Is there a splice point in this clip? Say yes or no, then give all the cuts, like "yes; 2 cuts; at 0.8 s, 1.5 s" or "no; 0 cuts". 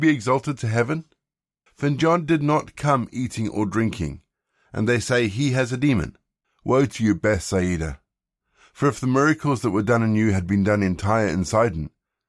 yes; 2 cuts; at 1.7 s, 6.4 s